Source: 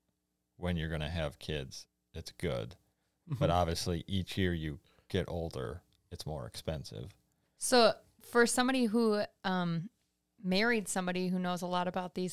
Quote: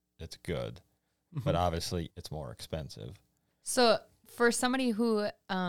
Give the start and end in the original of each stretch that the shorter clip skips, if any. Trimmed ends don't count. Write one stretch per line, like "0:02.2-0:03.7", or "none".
0:04.0-0:06.0